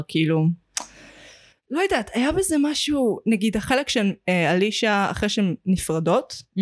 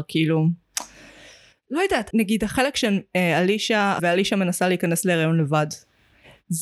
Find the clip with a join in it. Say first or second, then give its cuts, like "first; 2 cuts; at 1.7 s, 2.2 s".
second; 2 cuts; at 2.1 s, 4.0 s